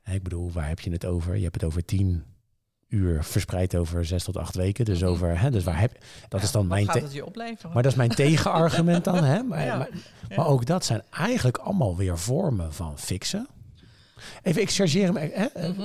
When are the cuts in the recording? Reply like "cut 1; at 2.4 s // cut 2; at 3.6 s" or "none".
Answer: cut 1; at 6.3 s